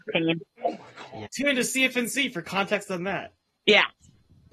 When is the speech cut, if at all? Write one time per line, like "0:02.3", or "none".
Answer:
0:01.3

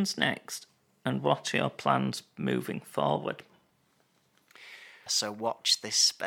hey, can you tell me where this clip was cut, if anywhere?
0:05.1

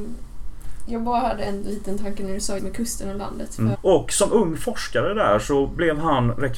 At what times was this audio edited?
0:02.6
0:03.7

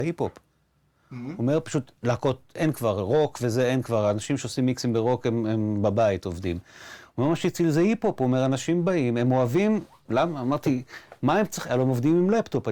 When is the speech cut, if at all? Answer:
none

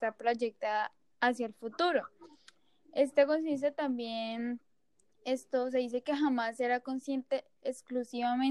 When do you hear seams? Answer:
none

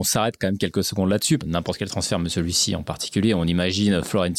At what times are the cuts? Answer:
0:01.4

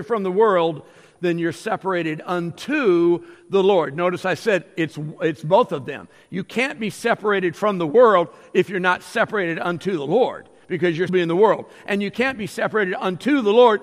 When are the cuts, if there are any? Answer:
0:11.1

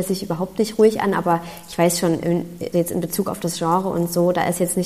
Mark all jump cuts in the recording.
0:02.7

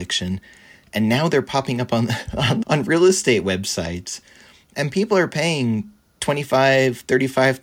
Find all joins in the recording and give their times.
0:02.6

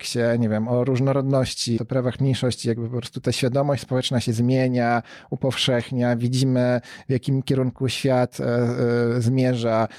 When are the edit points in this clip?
0:01.8

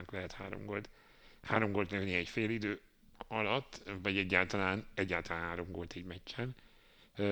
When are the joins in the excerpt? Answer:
none

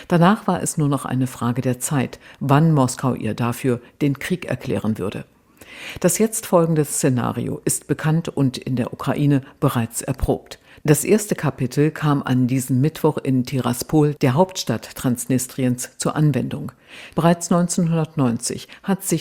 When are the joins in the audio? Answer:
0:17.1

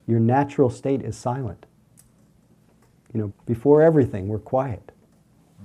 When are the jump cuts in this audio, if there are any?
0:03.3

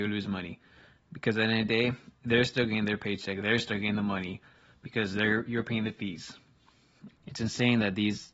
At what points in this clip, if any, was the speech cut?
0:07.1

